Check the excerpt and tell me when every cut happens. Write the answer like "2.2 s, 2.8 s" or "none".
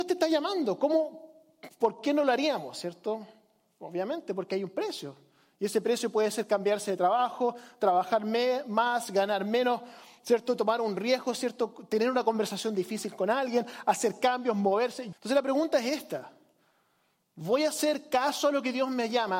15.1 s